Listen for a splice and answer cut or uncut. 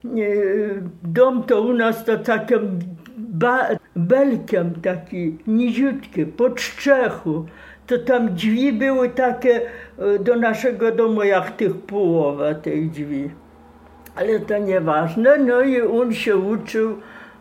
cut